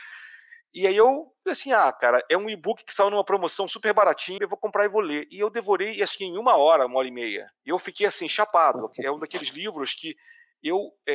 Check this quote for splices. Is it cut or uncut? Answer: cut